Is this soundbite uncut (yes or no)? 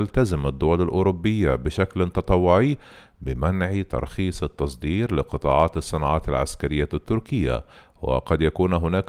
yes